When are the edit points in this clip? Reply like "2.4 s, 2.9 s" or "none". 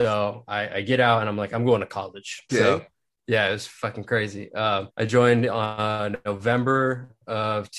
2.5 s, 4.9 s